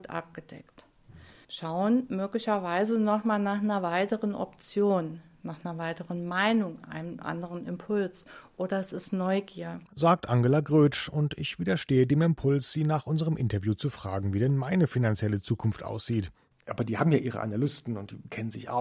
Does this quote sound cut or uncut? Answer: cut